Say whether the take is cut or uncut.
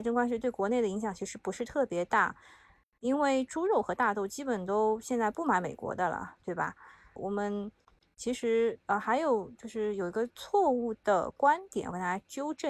cut